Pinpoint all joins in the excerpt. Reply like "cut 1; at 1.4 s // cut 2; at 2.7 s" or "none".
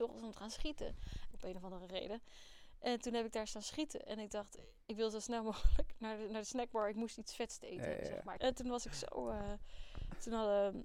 cut 1; at 1.3 s // cut 2; at 8.4 s